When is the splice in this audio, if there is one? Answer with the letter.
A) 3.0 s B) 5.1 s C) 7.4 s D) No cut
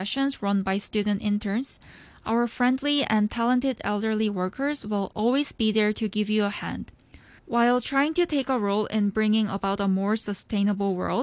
C